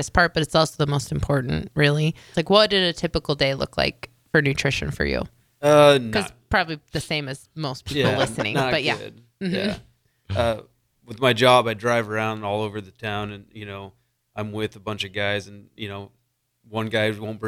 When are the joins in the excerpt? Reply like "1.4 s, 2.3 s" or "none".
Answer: 2.3 s